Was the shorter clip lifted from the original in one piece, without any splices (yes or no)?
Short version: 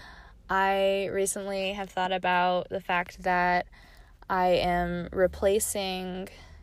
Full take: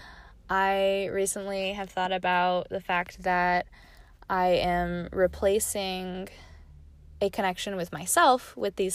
yes